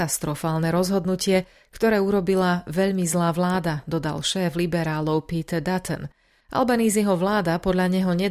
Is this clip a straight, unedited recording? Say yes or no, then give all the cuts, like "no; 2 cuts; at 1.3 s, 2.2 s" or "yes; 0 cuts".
yes; 0 cuts